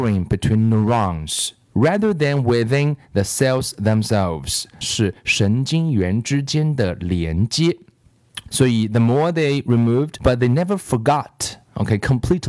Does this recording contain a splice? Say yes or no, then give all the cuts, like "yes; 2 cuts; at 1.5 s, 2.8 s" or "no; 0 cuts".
yes; 3 cuts; at 4.8 s, 8.5 s, 10.2 s